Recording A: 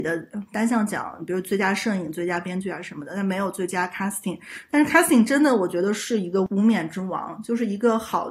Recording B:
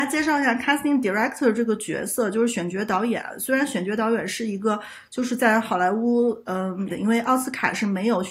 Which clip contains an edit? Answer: B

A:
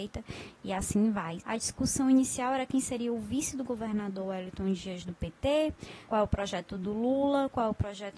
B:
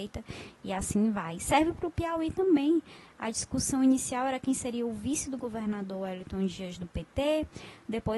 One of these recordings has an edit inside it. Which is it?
A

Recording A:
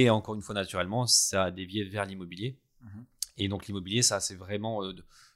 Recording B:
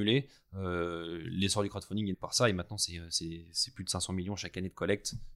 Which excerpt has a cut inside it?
B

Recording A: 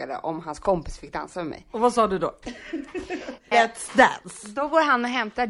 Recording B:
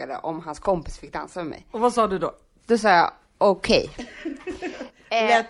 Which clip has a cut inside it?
A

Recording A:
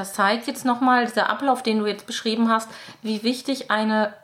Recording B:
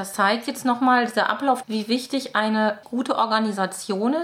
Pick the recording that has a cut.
B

